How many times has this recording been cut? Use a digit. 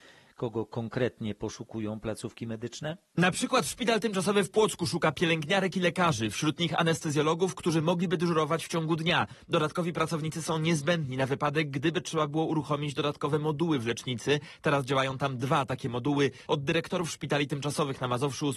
1